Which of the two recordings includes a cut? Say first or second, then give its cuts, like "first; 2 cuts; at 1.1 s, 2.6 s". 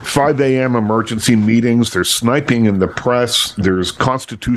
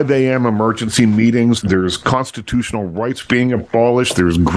second; 1 cut; at 1.6 s